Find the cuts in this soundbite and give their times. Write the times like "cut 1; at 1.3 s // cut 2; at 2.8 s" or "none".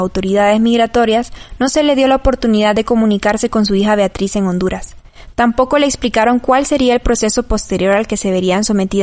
none

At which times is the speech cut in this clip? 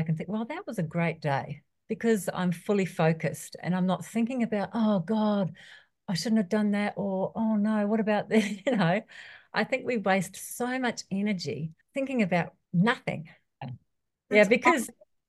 cut 1; at 11.8 s // cut 2; at 13.6 s

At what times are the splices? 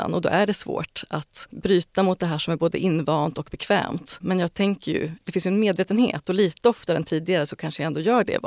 none

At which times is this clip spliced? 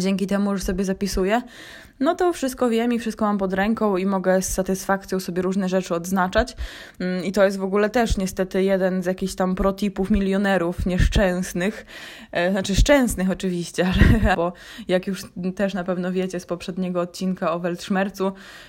cut 1; at 14.3 s

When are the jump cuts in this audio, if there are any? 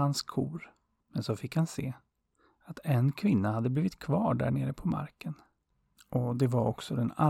cut 1; at 1.0 s

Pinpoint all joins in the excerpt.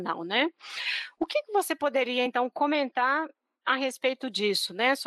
none

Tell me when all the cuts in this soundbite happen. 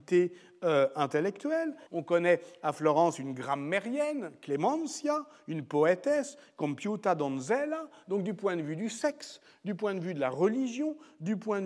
cut 1; at 1.9 s

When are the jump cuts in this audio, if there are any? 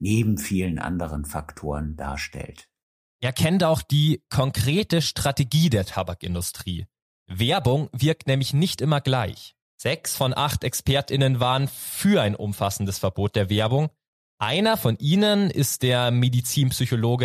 cut 1; at 9.6 s

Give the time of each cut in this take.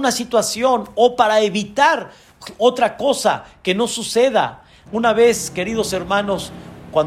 cut 1; at 4.9 s

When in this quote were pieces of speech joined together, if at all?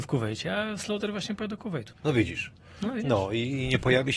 cut 1; at 1.9 s

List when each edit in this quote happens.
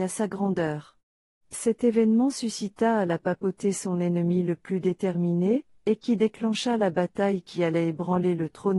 cut 1; at 5.8 s

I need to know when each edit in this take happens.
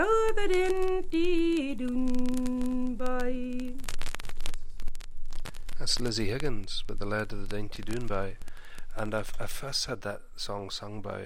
none

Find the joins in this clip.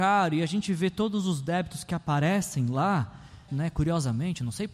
cut 1; at 3.5 s

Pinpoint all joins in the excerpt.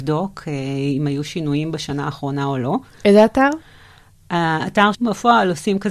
cut 1; at 4.9 s

